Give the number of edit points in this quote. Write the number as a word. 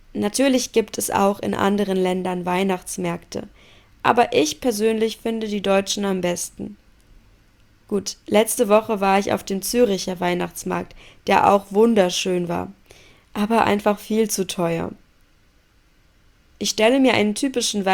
zero